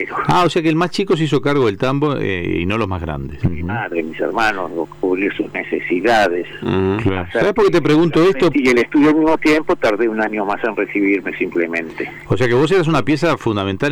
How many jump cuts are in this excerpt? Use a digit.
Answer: 2